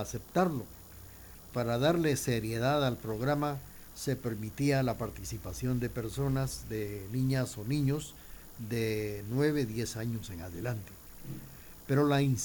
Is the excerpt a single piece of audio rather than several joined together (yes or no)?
no